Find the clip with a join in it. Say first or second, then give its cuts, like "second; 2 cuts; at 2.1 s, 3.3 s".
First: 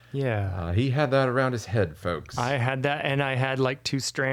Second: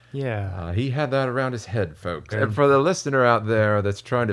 second; 1 cut; at 2.3 s